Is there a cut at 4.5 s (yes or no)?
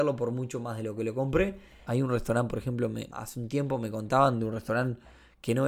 no